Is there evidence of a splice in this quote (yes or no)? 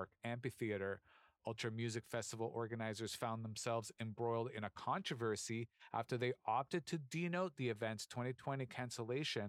no